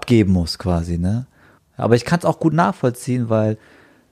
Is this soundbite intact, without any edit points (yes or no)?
no